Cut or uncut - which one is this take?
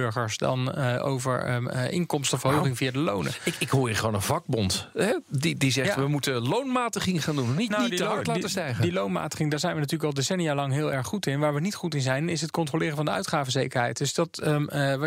uncut